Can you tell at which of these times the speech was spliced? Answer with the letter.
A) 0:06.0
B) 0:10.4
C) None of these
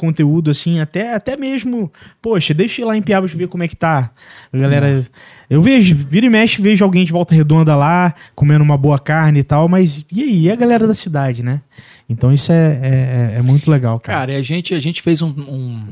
C